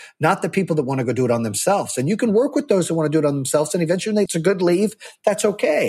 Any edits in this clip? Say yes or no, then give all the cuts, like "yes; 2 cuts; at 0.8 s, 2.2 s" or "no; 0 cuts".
yes; 1 cut; at 4.3 s